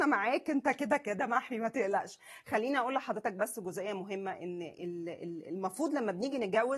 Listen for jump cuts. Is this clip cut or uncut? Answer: uncut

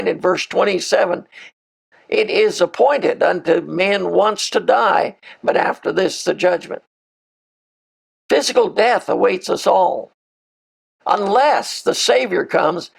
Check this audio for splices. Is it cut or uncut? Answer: cut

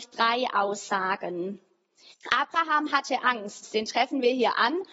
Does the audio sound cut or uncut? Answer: cut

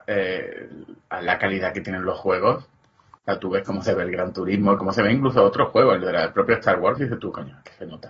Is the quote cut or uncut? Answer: cut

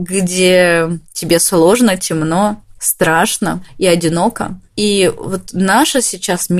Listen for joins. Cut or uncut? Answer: uncut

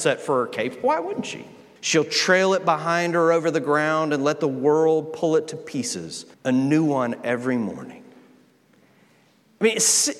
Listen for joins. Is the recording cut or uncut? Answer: cut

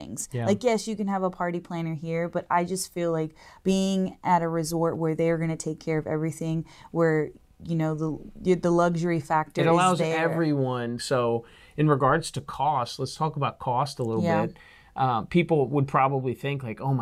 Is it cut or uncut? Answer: cut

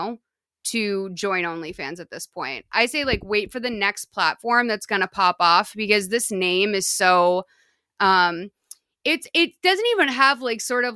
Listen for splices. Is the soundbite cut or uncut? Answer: uncut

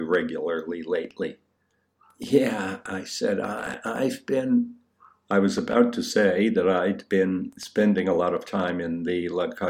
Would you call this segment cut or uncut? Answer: uncut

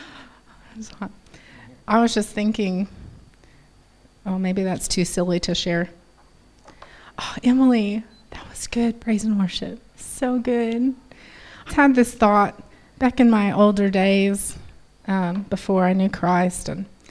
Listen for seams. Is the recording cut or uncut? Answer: cut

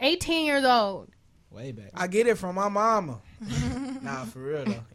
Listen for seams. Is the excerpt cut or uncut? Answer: cut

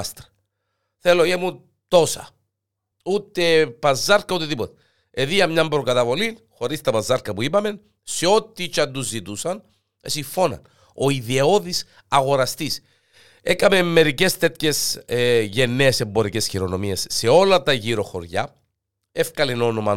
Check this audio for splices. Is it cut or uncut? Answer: cut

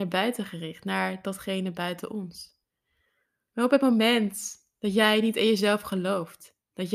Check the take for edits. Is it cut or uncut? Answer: cut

